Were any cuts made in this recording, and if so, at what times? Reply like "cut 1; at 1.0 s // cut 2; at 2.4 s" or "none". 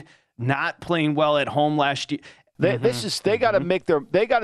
cut 1; at 2.6 s